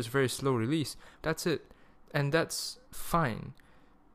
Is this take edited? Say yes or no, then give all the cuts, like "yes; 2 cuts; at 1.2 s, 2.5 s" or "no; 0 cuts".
yes; 2 cuts; at 1.2 s, 2.8 s